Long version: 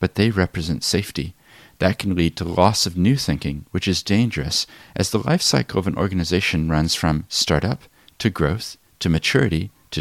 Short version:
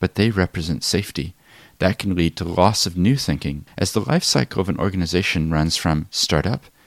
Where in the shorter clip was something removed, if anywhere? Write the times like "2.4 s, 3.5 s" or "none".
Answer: 3.7 s